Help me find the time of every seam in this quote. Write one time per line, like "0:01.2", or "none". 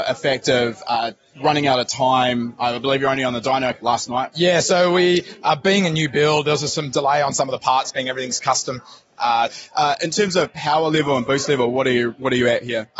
0:09.5